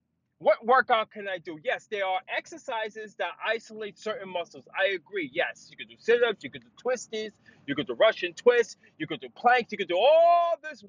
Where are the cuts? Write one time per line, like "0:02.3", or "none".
0:05.7